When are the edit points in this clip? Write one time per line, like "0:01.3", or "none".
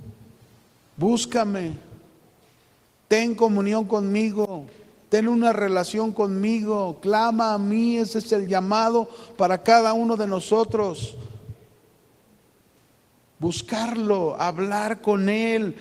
none